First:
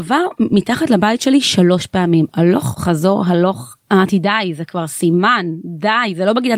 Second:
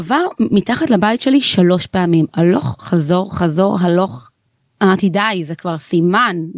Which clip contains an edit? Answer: first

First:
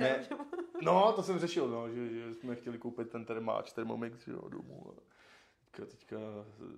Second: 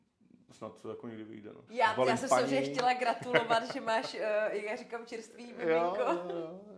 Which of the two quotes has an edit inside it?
second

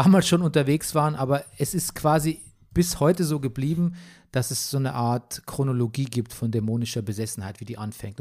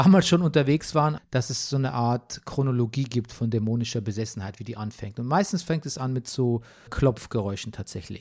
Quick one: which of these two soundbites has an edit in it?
second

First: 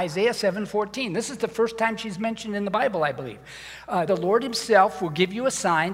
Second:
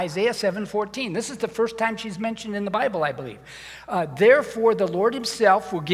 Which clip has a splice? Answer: first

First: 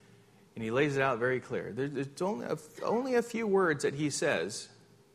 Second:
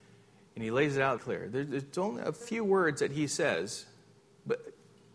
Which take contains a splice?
second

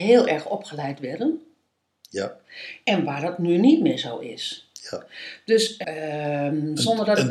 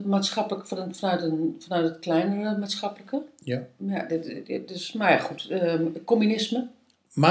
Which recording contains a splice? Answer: first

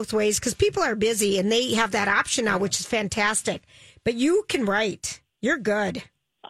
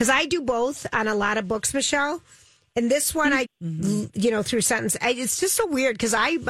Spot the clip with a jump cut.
second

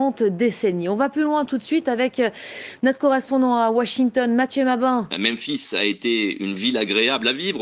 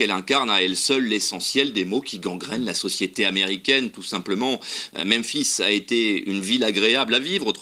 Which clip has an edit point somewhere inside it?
first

